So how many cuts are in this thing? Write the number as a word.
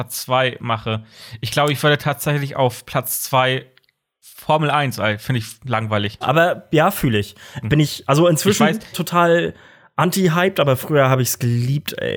three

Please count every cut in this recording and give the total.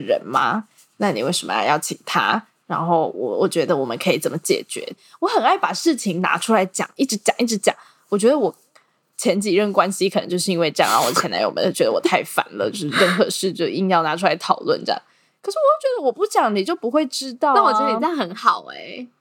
zero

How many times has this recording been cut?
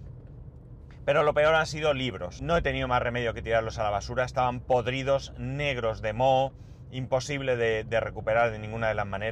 one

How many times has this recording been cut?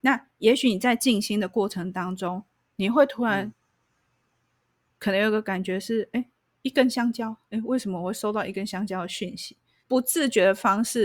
one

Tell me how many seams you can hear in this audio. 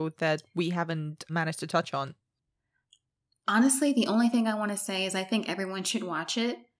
one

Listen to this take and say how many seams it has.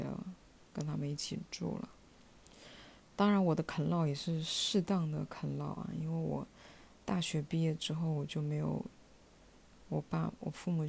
one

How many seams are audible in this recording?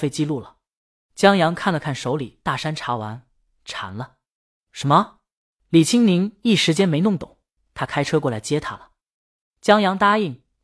two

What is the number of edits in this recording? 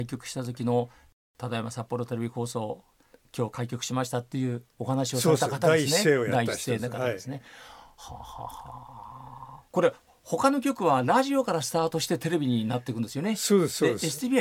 one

